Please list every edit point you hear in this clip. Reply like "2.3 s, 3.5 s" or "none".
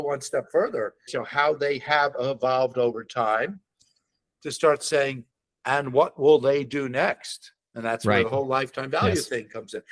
1.1 s